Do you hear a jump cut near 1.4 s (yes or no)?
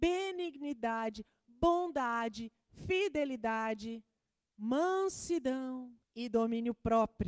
no